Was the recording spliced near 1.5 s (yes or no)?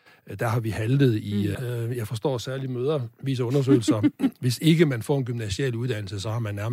yes